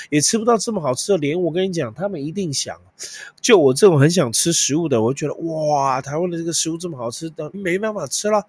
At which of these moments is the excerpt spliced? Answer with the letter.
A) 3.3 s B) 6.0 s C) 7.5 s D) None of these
C